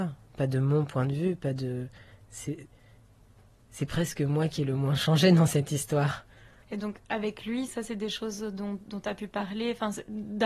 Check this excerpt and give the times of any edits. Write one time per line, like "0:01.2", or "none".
0:06.6
0:07.7